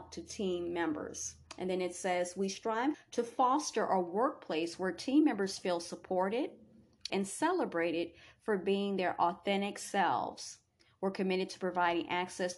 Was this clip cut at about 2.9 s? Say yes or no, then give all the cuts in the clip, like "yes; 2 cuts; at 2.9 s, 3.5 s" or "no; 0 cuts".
yes; 2 cuts; at 2.9 s, 7.1 s